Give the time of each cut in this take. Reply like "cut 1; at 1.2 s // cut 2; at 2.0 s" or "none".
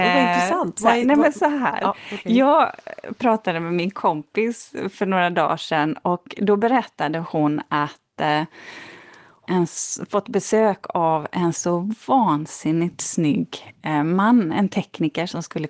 cut 1; at 9.4 s